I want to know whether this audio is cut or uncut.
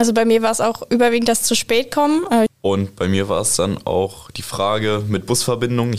cut